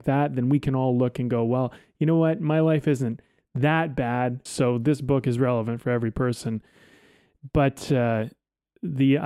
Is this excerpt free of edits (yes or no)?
no